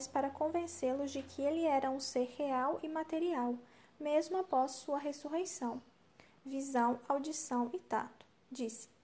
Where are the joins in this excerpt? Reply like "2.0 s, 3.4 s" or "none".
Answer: none